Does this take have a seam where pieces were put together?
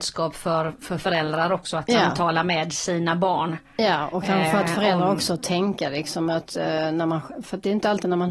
no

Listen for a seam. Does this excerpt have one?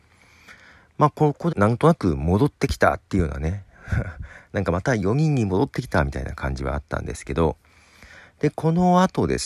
yes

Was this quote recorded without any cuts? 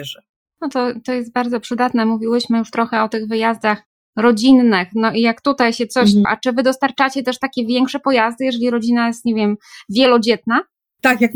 no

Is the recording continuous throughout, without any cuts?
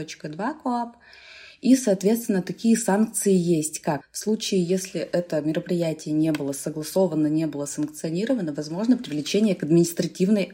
no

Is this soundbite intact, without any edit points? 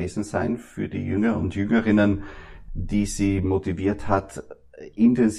no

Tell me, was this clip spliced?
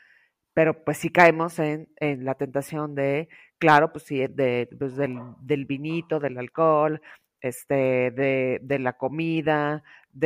no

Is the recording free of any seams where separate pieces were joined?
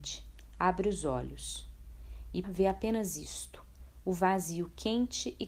no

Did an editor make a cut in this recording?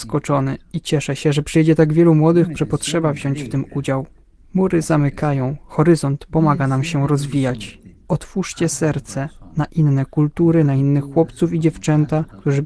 yes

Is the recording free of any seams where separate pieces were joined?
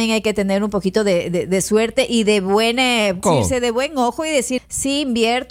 no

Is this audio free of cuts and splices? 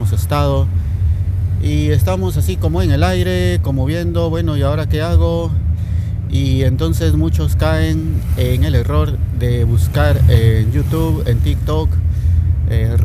yes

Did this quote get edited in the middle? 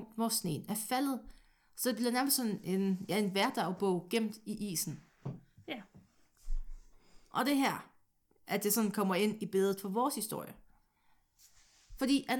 no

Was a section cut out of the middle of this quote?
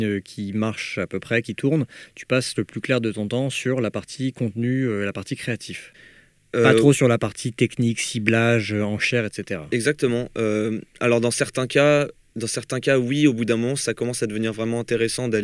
no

